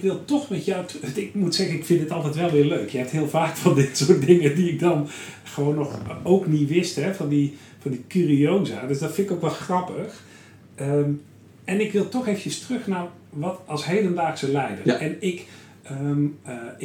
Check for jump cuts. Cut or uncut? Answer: uncut